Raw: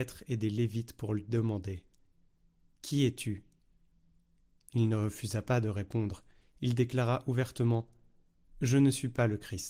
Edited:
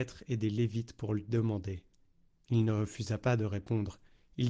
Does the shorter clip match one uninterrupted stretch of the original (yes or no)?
no